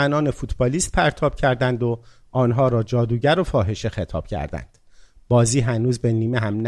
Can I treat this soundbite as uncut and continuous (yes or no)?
yes